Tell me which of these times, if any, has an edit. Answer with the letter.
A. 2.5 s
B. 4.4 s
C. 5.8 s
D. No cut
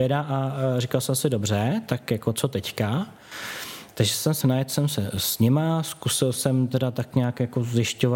B